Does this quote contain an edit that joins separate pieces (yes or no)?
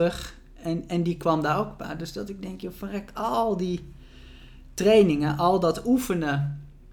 no